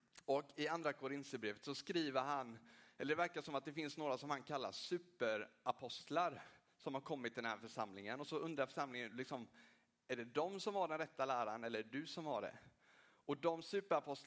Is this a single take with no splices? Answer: yes; 0 cuts

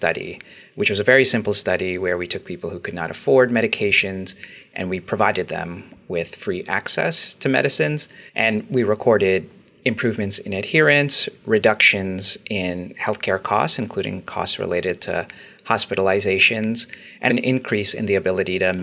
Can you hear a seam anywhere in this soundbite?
yes; 2 cuts; at 8.3 s, 17.3 s

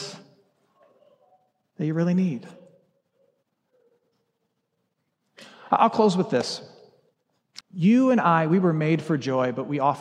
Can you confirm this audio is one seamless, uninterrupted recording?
no; 1 cut; at 7.6 s

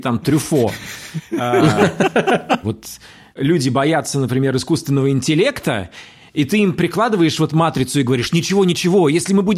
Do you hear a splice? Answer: yes; 1 cut; at 2.6 s

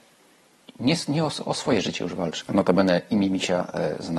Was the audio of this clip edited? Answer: yes; 1 cut; at 2.4 s

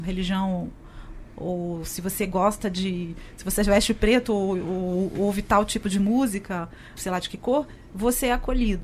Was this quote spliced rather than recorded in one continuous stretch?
yes; 1 cut; at 7.0 s

